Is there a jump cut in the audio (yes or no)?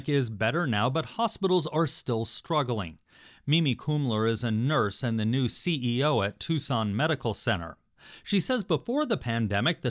no